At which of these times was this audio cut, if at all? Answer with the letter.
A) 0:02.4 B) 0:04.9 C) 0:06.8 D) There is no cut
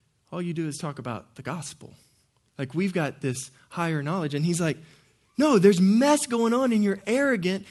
D